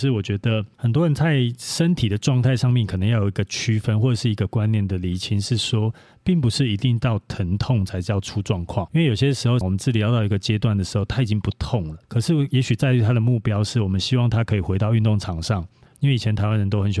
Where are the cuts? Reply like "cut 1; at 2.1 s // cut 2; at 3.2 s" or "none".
cut 1; at 9.6 s // cut 2; at 12.0 s // cut 3; at 15.9 s